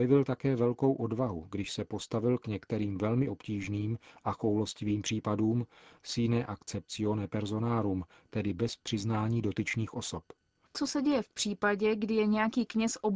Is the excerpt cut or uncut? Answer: cut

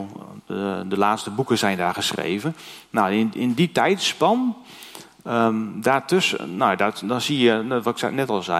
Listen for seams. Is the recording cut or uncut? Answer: uncut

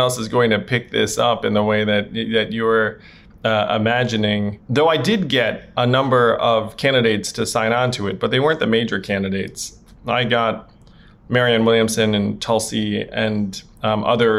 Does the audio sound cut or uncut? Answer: uncut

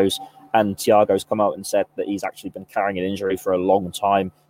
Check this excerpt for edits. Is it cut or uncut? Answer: uncut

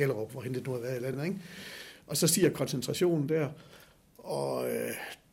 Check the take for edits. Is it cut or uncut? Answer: uncut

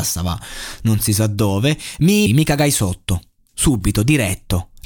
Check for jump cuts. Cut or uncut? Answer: cut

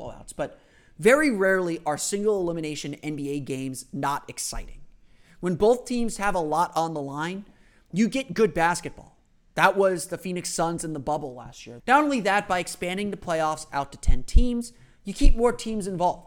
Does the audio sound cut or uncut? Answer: cut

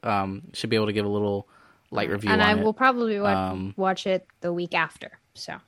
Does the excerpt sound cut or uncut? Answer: uncut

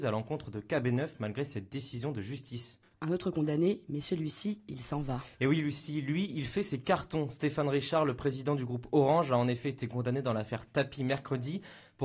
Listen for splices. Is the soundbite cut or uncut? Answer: uncut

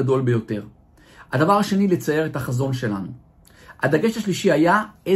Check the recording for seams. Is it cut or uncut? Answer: uncut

